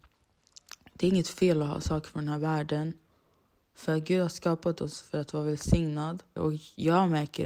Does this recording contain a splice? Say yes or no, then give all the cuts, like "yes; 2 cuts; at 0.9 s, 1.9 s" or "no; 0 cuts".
yes; 1 cut; at 6.4 s